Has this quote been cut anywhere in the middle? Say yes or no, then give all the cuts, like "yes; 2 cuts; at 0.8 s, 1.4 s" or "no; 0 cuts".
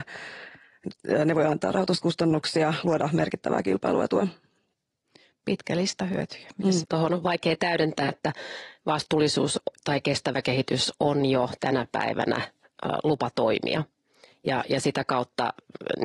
yes; 2 cuts; at 6.8 s, 8.1 s